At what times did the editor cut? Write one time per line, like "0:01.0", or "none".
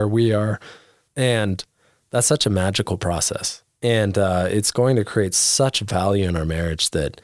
0:01.1